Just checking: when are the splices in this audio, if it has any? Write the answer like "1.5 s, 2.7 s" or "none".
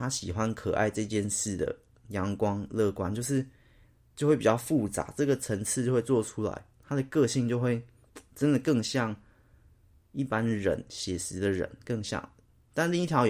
none